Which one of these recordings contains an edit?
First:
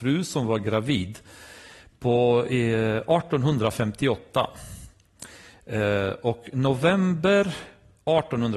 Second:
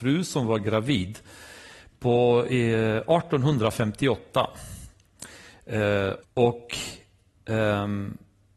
second; 1 cut; at 6.2 s

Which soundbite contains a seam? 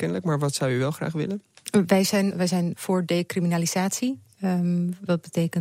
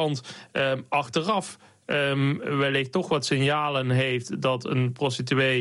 first; 1 cut; at 2.3 s

